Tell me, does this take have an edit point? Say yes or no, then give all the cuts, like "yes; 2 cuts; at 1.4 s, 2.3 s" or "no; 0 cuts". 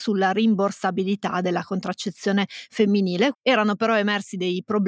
yes; 1 cut; at 3.3 s